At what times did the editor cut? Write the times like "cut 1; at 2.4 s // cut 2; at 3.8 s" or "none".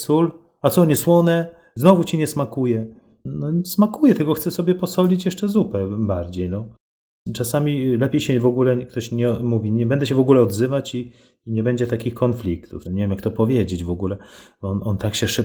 cut 1; at 12.8 s